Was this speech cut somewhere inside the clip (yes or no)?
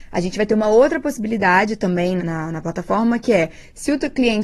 yes